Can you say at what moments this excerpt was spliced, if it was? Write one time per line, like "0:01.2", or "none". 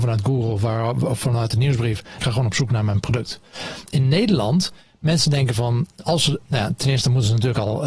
0:02.2